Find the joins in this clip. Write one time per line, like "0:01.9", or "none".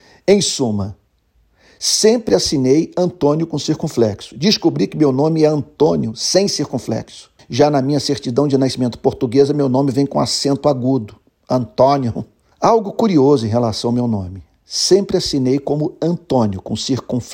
0:07.4
0:12.5